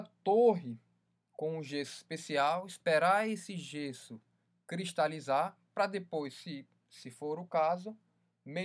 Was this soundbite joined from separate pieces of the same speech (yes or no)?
no